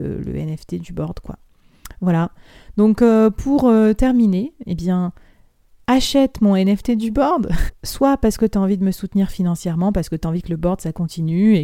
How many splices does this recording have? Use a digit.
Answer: 1